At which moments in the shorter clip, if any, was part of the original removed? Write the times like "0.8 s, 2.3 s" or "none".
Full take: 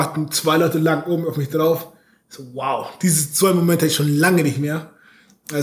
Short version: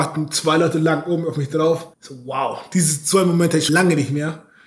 1.9 s, 3.7 s